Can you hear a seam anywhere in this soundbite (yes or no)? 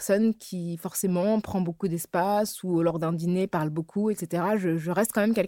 no